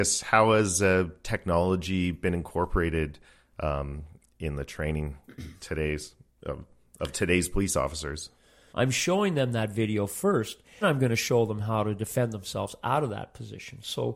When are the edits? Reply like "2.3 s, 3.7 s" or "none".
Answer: 8.7 s, 10.8 s